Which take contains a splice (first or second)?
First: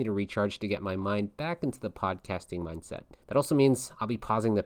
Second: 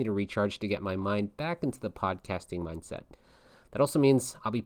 first